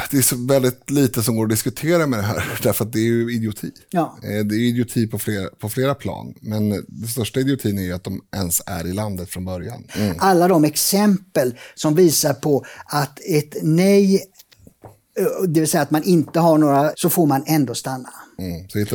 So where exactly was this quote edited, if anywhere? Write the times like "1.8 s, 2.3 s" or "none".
9.9 s, 16.9 s